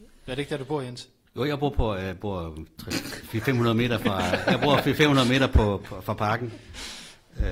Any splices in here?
no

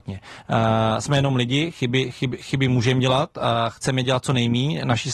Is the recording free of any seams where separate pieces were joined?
yes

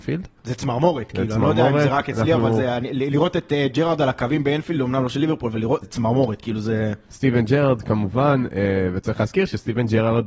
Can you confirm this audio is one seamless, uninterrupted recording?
no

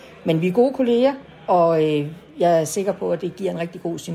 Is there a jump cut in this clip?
no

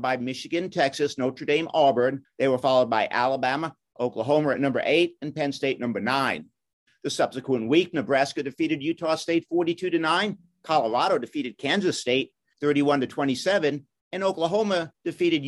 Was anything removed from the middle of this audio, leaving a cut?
yes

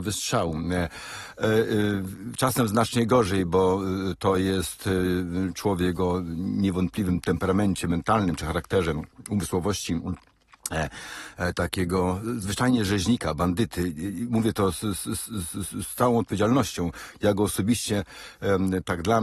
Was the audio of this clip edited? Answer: no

